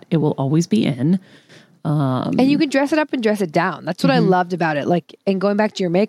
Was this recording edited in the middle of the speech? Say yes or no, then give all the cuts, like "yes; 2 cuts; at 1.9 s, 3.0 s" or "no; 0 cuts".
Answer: no; 0 cuts